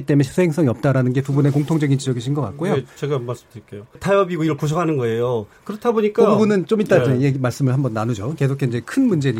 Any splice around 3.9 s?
yes; 1 cut; at 3.9 s

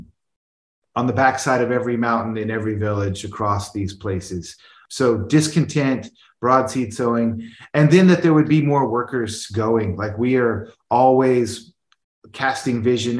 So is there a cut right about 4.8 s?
no; 0 cuts

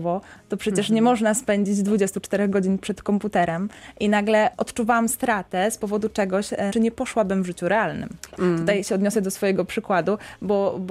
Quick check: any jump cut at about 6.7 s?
yes; 2 cuts; at 6.7 s, 8.4 s

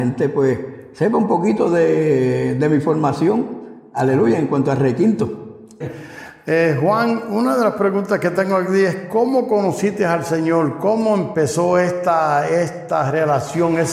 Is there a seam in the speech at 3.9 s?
no; 1 cut; at 5.8 s

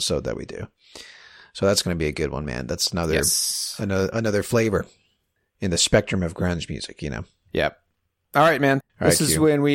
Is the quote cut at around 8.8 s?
yes; 1 cut; at 8.8 s

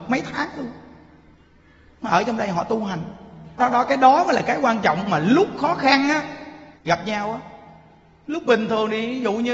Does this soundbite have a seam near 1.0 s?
no; 2 cuts; at 3.6 s, 6.8 s

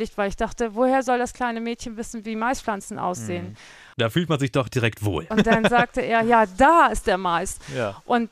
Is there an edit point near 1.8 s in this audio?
no; 2 cuts; at 3.9 s, 5.3 s

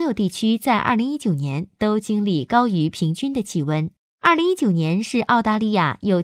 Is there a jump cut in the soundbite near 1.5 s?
no; 1 cut; at 4.1 s

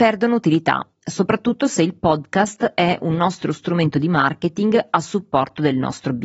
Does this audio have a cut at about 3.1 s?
no; 0 cuts

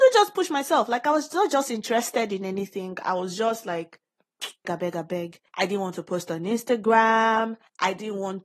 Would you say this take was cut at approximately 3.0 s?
no; 1 cut; at 4.6 s

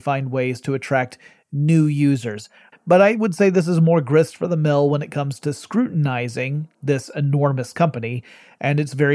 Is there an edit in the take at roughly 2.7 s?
yes; 1 cut; at 2.7 s

